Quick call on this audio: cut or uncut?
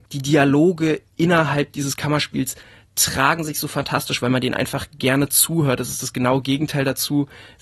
uncut